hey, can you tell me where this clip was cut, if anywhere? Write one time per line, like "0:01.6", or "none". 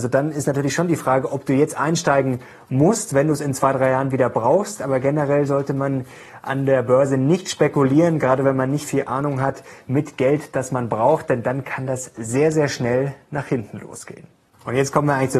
none